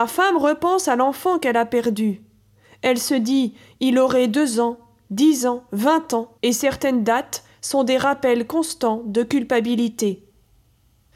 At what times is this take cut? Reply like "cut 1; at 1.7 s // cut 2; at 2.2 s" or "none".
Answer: cut 1; at 6.4 s